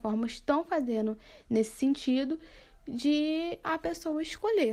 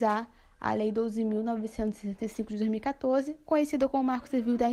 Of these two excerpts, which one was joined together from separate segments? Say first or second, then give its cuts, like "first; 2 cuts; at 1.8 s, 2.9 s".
first; 1 cut; at 3.6 s